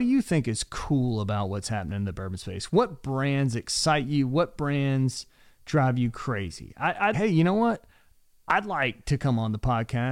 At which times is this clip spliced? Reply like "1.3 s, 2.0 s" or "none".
7.1 s